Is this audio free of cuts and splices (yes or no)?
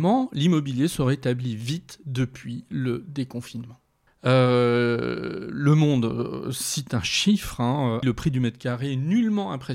no